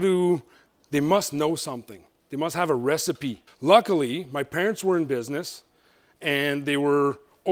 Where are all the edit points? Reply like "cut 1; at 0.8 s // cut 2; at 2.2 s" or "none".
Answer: cut 1; at 3.5 s